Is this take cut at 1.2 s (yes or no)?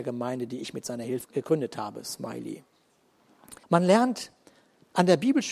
yes